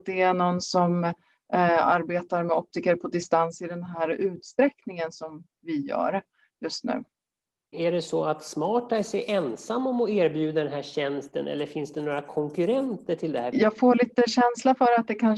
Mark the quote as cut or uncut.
cut